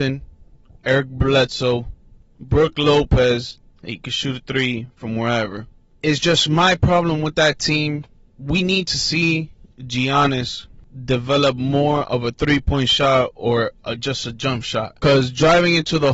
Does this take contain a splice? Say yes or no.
no